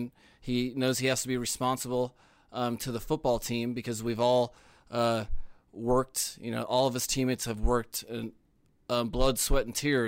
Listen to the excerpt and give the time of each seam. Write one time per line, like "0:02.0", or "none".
none